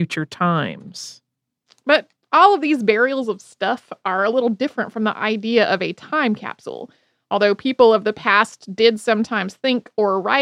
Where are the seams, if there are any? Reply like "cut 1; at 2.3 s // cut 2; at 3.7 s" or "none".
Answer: none

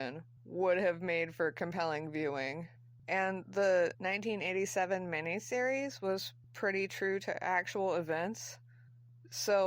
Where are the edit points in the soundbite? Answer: cut 1; at 3.0 s // cut 2; at 6.4 s

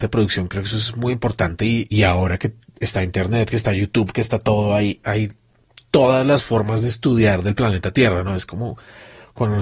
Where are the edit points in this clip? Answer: cut 1; at 1.9 s

